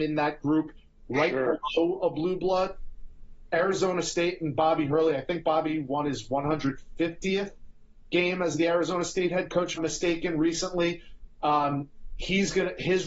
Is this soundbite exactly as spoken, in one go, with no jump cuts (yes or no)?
no